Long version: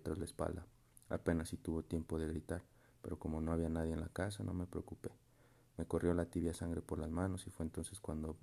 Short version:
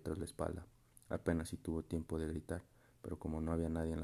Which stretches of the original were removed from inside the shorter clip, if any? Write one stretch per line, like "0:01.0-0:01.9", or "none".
none